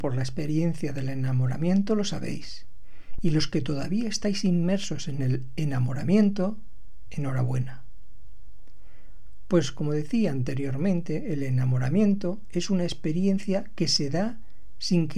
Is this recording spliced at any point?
no; 0 cuts

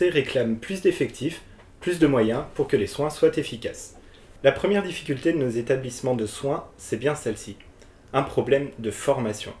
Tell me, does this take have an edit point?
yes; 1 cut; at 4.4 s

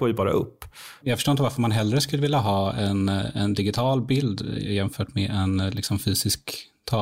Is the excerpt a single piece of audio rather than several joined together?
no; 1 cut; at 1.0 s

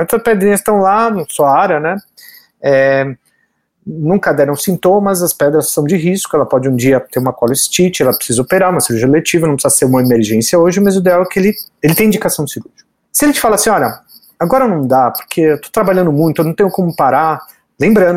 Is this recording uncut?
yes; 0 cuts

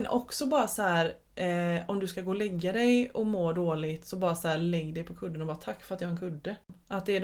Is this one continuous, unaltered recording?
yes; 0 cuts

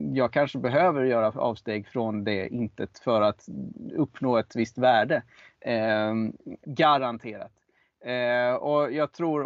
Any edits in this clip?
yes; 1 cut; at 6.6 s

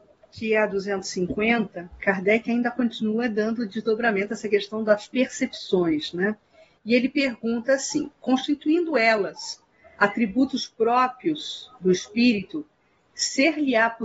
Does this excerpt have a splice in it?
no; 0 cuts

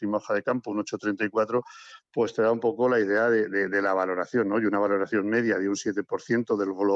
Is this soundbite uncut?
yes; 0 cuts

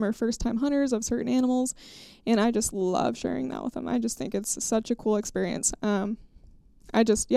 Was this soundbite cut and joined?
no; 0 cuts

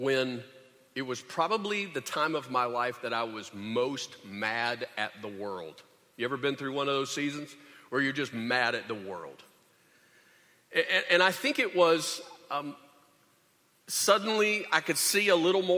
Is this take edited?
no; 0 cuts

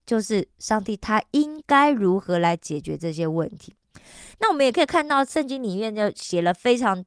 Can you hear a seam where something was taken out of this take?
no; 0 cuts

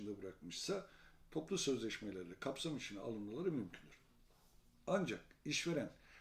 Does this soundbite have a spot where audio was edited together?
no; 0 cuts

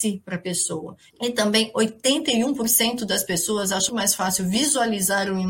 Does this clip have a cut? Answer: yes; 2 cuts; at 1.1 s, 3.9 s

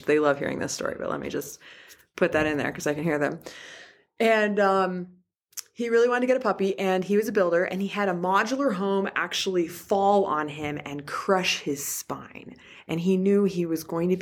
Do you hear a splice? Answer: no; 0 cuts

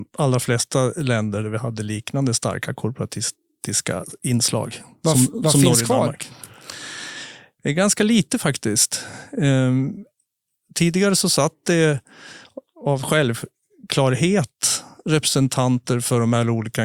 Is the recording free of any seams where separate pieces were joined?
yes; 0 cuts

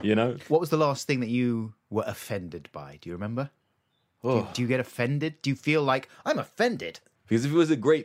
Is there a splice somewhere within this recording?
yes; 1 cut; at 7.2 s

